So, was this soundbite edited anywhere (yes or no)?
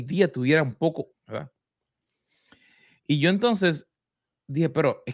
yes